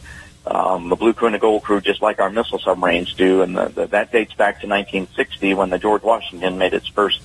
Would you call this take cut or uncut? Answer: uncut